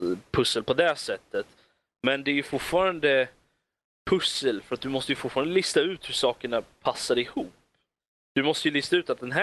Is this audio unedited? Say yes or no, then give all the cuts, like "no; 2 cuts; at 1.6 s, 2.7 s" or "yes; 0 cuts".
yes; 0 cuts